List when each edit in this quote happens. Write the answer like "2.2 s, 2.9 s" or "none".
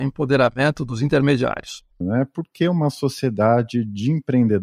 2.0 s